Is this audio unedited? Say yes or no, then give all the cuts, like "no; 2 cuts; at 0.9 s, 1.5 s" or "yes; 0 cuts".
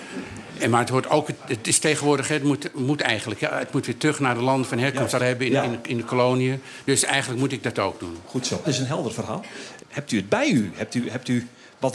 no; 3 cuts; at 5.2 s, 8.6 s, 9.8 s